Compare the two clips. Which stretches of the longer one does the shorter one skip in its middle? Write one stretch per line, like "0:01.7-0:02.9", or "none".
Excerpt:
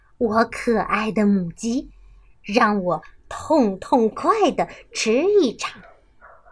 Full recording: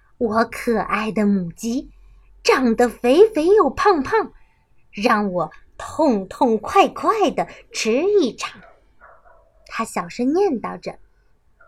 0:02.3-0:04.8
0:06.6-0:06.9

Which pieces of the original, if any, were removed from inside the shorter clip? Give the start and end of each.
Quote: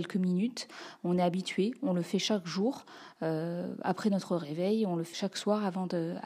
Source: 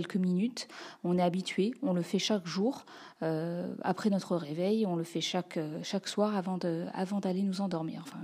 0:05.1-0:05.8

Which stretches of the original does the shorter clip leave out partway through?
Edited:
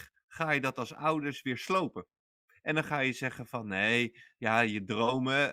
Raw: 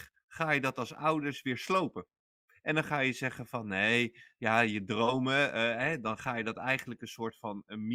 none

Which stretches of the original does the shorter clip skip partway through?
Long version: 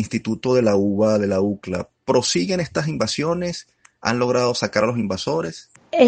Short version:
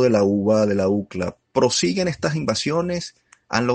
none

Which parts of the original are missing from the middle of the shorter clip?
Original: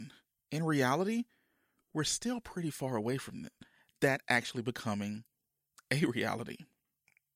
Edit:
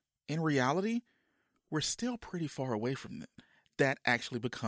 none

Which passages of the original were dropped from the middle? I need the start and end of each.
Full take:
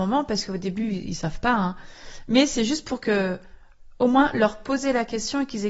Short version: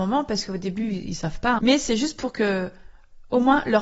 0:01.6-0:02.3

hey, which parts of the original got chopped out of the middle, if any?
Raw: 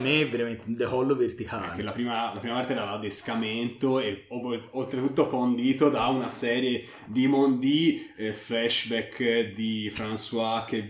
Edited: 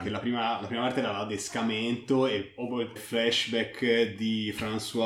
0:04.7-0:08.3

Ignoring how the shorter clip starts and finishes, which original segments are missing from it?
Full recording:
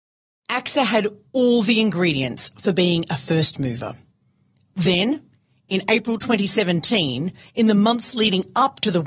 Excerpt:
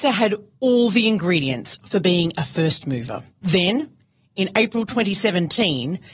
0:04.0-0:04.6

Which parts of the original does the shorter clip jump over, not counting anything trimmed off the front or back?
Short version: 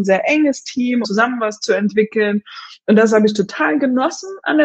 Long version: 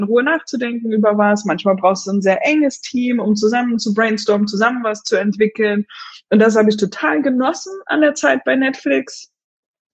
0:03.2-0:04.5

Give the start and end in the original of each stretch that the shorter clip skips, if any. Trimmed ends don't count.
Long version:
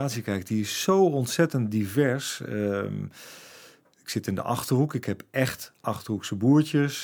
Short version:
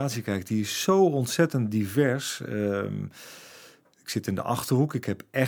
none

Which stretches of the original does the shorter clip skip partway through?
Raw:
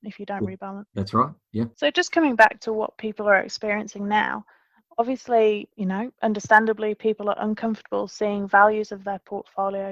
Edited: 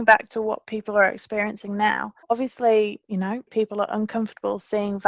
0:04.5-0:04.9
0:06.2-0:07.0

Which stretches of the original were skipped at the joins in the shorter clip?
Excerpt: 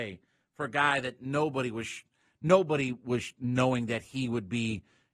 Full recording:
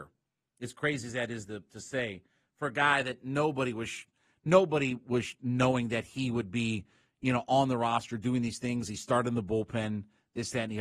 none

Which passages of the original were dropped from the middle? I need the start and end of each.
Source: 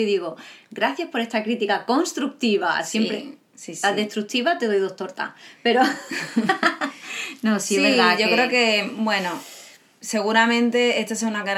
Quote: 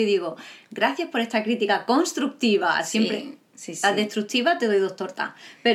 none

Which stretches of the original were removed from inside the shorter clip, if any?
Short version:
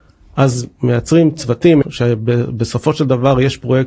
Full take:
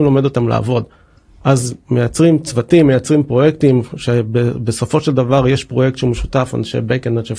0:02.9-0:03.9

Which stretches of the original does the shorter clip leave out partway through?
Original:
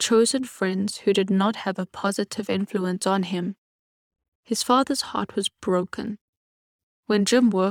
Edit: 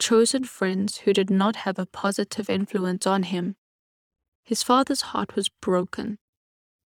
none

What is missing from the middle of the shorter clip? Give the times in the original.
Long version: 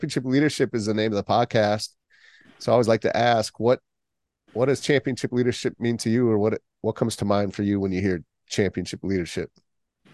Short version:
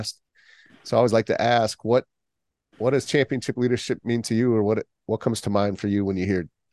none

